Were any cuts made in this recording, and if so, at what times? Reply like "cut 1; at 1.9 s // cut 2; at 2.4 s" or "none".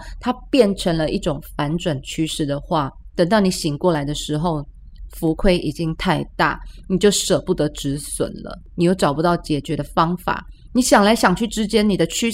none